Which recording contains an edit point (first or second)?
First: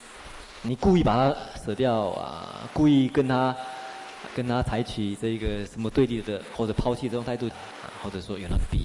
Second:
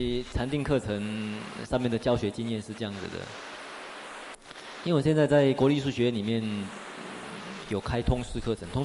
first